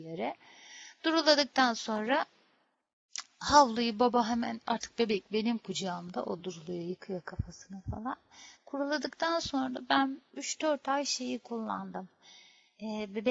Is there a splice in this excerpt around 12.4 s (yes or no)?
no